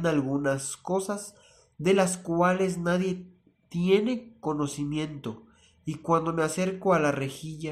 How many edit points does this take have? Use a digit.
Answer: 0